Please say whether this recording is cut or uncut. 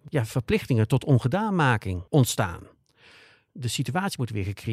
cut